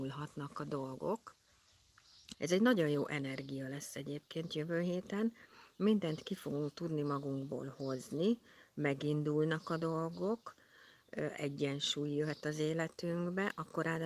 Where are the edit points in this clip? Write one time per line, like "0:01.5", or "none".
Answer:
0:02.3